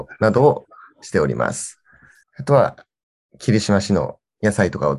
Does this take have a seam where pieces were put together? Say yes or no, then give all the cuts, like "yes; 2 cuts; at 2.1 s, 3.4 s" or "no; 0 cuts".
yes; 1 cut; at 2.2 s